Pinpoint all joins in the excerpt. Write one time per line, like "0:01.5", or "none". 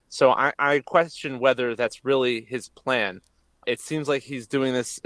none